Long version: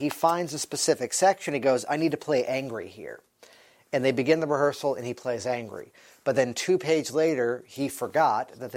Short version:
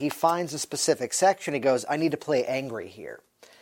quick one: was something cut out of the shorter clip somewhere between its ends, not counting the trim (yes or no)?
no